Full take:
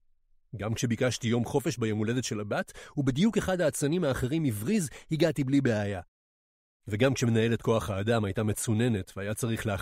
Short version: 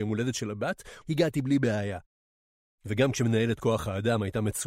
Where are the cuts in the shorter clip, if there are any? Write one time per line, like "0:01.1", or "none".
0:01.0